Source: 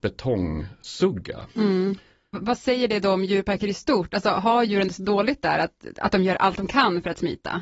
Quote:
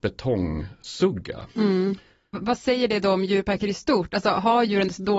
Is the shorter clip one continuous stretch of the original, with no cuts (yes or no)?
yes